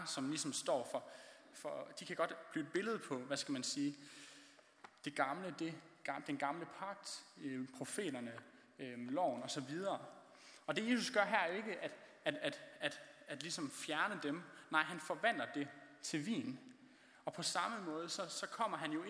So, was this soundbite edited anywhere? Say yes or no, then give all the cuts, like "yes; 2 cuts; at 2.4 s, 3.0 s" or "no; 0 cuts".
no; 0 cuts